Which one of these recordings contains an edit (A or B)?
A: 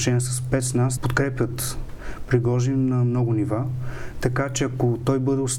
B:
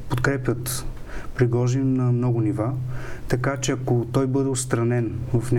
A